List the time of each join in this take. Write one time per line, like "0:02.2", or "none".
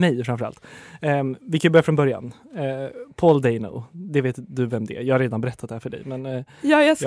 none